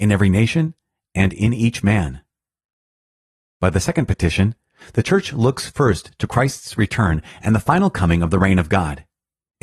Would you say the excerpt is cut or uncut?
uncut